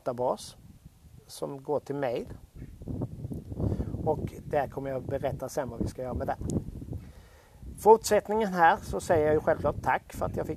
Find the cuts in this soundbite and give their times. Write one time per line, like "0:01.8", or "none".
none